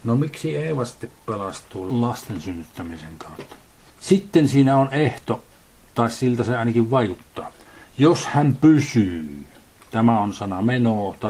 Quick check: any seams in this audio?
no; 0 cuts

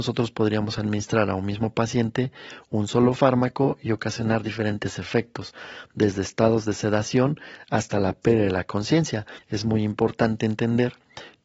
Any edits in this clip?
yes; 1 cut; at 9.4 s

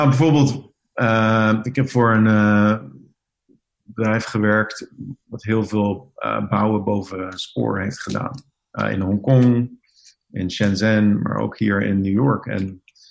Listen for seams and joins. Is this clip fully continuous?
yes; 0 cuts

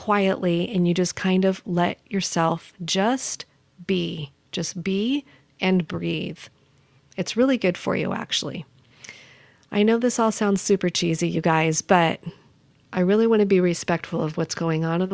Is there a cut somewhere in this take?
no; 0 cuts

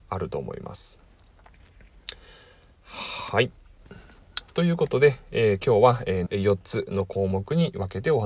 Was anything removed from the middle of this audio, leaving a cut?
yes; 1 cut; at 6.3 s

